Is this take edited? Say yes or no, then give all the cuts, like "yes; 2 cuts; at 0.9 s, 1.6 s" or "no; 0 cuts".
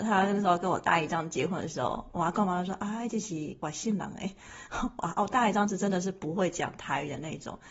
no; 0 cuts